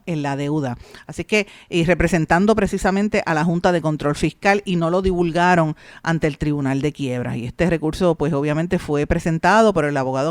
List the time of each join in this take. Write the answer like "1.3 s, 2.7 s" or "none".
none